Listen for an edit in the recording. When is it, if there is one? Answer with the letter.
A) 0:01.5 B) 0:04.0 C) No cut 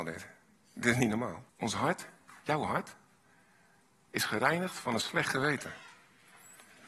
A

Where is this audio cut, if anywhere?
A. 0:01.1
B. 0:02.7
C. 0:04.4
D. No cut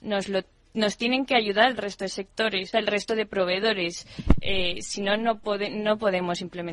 B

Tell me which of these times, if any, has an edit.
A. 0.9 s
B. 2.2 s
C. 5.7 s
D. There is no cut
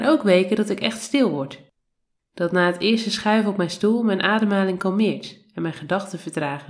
D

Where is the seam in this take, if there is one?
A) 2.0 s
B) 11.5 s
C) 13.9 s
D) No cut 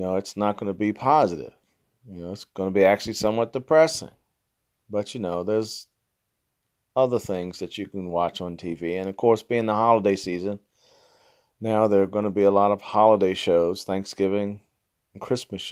D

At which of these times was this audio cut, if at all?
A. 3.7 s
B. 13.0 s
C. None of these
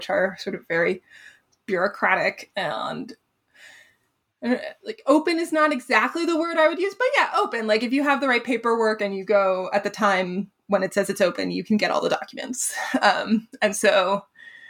C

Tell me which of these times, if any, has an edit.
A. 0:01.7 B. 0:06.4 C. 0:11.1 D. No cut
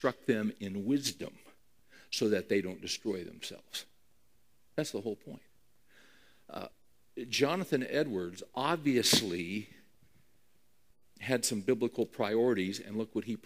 D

